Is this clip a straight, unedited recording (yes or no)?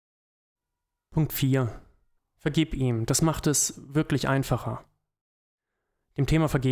no